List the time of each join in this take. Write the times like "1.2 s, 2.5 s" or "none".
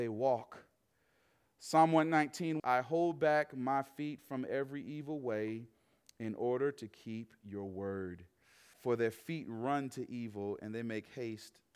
2.6 s, 8.7 s